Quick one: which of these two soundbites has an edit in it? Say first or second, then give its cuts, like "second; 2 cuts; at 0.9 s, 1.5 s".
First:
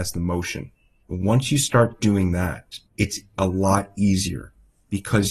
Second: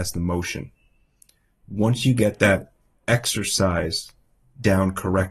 first; 2 cuts; at 1.0 s, 2.9 s